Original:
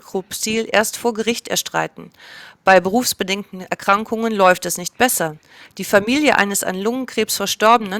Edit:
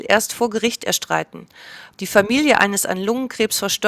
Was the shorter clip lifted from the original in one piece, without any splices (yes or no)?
no